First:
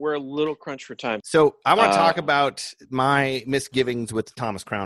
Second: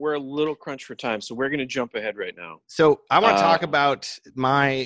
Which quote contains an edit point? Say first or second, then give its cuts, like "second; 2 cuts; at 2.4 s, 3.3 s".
first; 1 cut; at 1.2 s